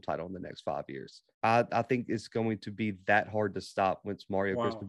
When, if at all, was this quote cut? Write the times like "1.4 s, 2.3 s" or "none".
1.3 s